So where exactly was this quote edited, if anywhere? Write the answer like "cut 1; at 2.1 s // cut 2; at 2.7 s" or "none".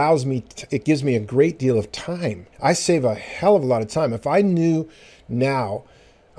cut 1; at 2.5 s